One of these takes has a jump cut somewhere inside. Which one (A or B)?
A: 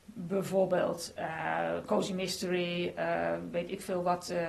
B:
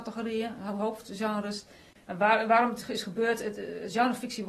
B